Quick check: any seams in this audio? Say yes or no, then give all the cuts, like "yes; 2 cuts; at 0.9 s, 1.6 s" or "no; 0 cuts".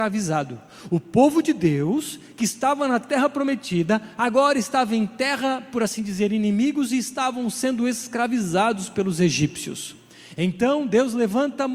no; 0 cuts